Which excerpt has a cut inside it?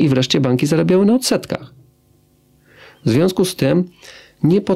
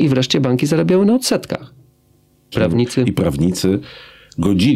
second; 1 cut; at 2.5 s

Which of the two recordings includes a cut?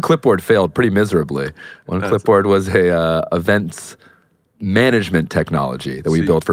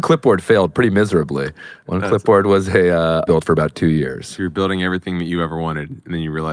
second; 1 cut; at 3.3 s

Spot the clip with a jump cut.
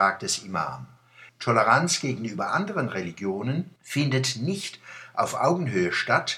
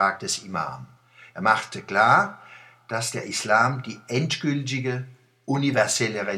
first; 2 cuts; at 1.3 s, 3.8 s

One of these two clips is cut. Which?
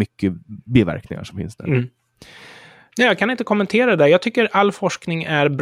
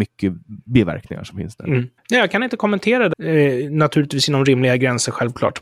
second; 2 cuts; at 2.0 s, 3.1 s

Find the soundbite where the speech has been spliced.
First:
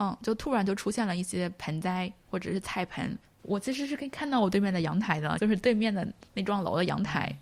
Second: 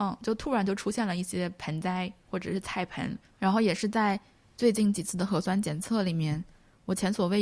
first; 2 cuts; at 3.2 s, 5.4 s

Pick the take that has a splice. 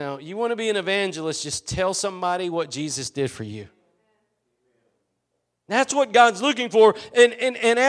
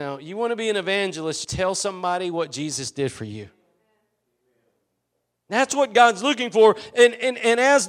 second; 1 cut; at 1.4 s

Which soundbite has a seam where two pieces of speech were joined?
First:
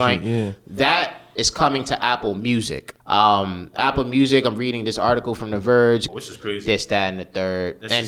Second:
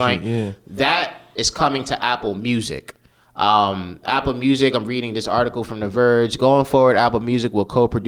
first; 2 cuts; at 3.0 s, 6.1 s

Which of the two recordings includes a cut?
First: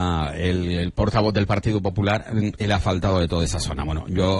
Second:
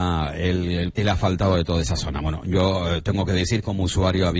second; 1 cut; at 0.9 s

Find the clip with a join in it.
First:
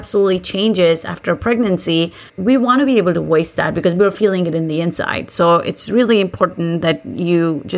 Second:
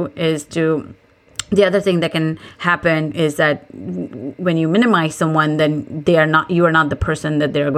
first; 1 cut; at 2.3 s

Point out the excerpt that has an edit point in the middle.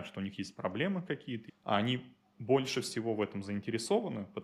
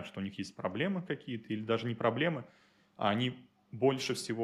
first; 1 cut; at 1.5 s

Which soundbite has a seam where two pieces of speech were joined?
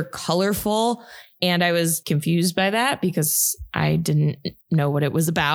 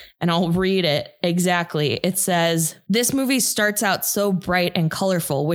first; 1 cut; at 1.4 s

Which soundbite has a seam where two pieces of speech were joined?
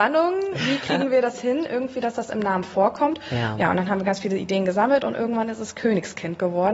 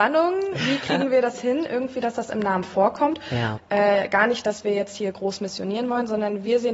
second; 1 cut; at 3.6 s

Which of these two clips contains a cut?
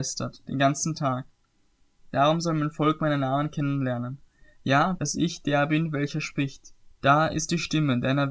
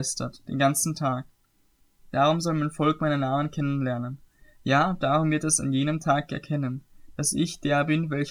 first; 2 cuts; at 5.0 s, 6.9 s

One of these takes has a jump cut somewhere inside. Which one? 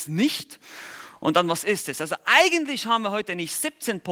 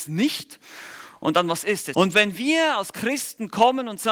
second; 1 cut; at 1.9 s

